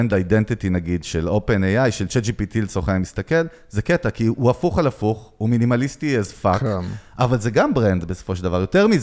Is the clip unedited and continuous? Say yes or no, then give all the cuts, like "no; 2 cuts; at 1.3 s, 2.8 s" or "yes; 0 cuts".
yes; 0 cuts